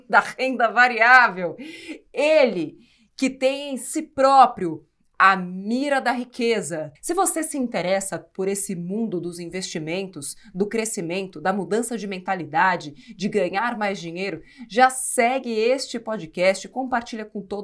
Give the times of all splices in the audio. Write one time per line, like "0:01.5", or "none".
0:06.9